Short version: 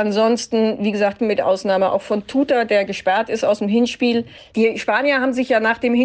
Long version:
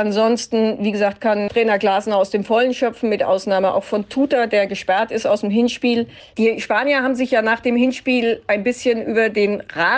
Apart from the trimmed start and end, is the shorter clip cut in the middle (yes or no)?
yes